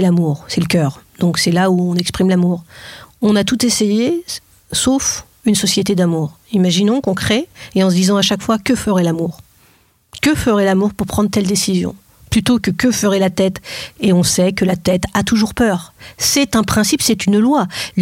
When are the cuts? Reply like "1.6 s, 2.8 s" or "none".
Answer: none